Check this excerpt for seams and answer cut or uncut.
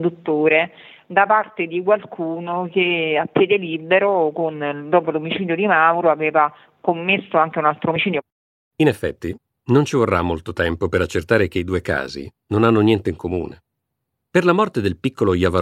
uncut